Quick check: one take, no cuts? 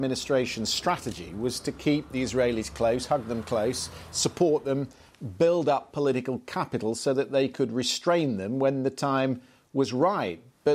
yes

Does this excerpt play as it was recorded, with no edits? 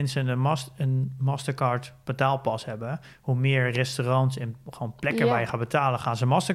yes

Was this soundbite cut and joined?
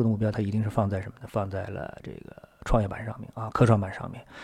no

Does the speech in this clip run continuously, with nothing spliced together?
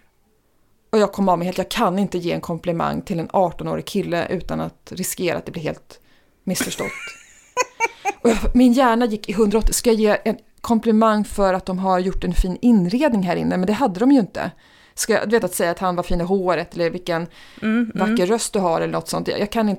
no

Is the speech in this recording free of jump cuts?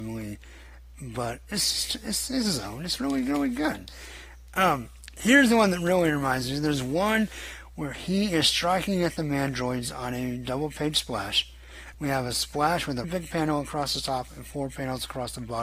no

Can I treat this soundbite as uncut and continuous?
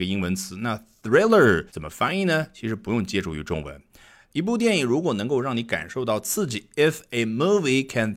no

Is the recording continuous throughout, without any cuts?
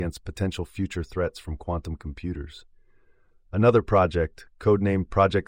yes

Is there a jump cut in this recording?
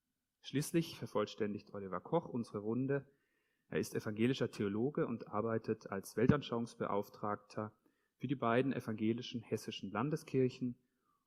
no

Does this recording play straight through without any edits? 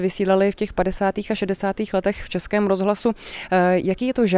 yes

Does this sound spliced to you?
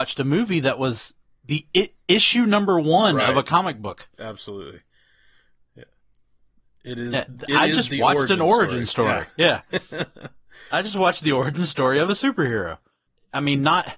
no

